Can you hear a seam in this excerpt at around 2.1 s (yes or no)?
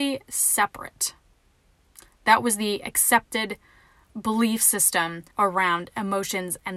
no